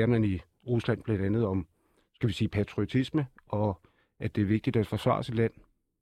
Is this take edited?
no; 0 cuts

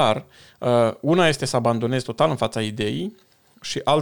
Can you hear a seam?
no; 0 cuts

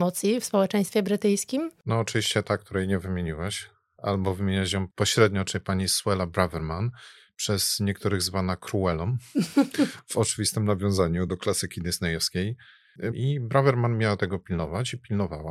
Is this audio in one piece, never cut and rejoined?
no; 2 cuts; at 11.3 s, 13.1 s

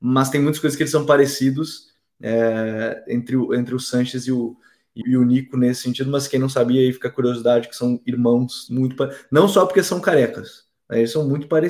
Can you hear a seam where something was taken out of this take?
yes; 2 cuts; at 5.0 s, 8.7 s

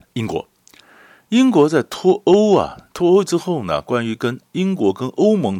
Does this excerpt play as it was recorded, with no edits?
yes; 0 cuts

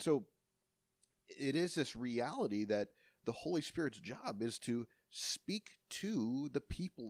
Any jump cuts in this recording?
no; 0 cuts

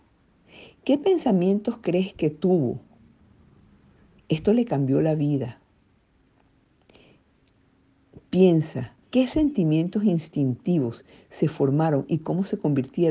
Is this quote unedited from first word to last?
no; 2 cuts; at 4.2 s, 9.0 s

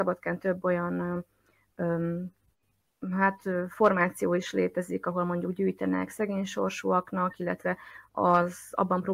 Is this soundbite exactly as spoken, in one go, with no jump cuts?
yes; 0 cuts

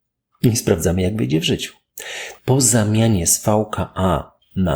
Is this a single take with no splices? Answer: no; 1 cut; at 2.4 s

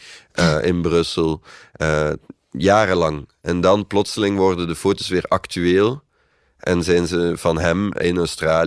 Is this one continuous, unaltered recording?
yes; 0 cuts

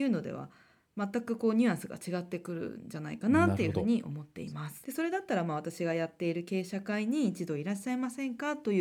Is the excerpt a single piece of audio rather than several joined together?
no; 1 cut; at 4.8 s

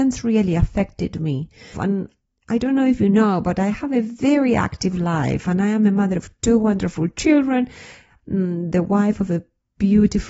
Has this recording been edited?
yes; 1 cut; at 1.7 s

